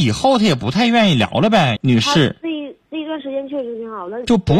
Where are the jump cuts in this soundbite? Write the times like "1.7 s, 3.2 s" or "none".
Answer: 1.8 s